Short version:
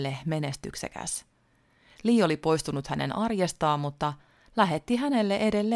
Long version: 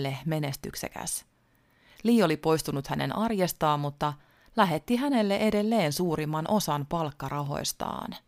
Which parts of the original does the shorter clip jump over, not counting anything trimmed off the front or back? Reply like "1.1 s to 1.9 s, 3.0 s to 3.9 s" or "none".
none